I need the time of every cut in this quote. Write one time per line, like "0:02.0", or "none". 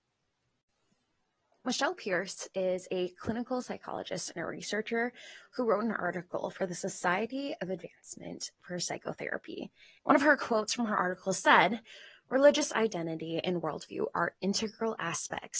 0:10.0